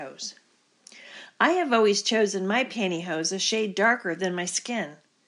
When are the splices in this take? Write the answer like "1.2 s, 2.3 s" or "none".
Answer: none